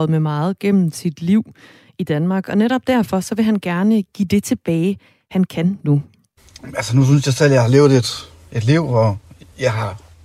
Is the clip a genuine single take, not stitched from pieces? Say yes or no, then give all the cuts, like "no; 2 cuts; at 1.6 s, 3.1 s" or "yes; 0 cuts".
yes; 0 cuts